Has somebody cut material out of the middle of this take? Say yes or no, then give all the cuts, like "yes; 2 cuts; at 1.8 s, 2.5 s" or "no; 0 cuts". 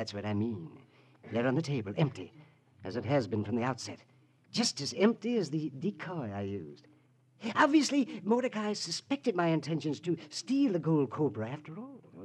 no; 0 cuts